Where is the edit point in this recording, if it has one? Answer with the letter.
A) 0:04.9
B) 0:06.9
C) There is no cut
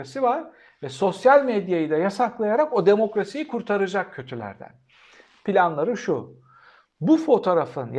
C